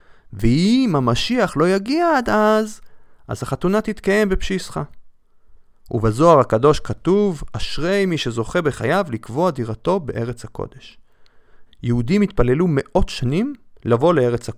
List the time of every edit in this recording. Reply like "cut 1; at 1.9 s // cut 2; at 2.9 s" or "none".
cut 1; at 11.7 s